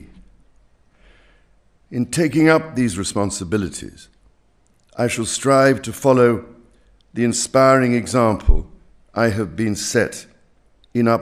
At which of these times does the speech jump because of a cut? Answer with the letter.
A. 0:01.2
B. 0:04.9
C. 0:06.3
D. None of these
D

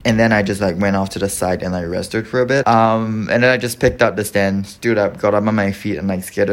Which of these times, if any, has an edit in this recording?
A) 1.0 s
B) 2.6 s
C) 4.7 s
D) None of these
B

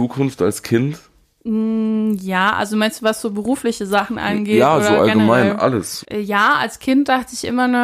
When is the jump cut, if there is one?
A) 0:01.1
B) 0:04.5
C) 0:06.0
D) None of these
C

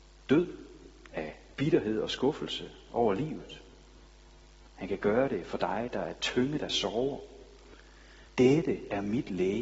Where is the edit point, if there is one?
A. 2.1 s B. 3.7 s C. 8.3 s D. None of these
C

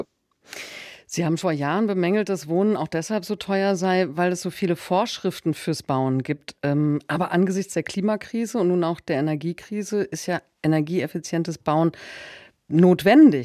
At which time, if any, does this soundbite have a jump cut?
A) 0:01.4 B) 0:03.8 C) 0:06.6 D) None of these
A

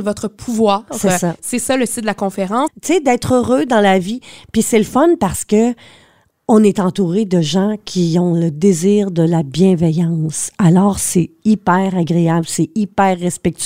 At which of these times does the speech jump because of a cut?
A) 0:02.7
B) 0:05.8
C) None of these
A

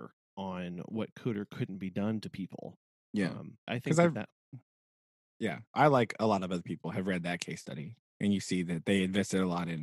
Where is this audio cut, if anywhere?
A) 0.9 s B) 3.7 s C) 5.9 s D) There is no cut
B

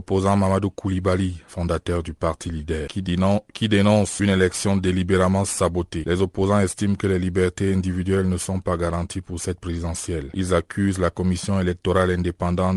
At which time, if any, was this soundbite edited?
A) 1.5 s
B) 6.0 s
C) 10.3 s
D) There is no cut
A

